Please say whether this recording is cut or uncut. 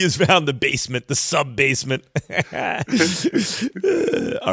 uncut